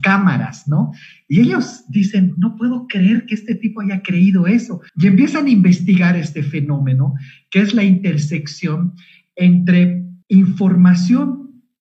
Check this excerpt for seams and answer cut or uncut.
cut